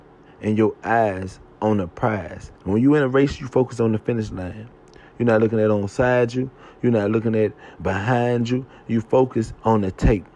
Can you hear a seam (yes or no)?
yes